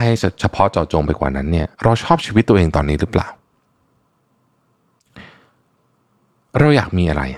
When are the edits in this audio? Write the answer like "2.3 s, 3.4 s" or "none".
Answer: 1.7 s